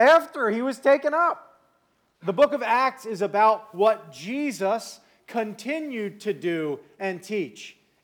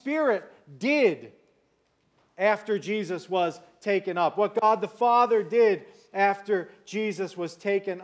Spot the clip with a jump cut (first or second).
first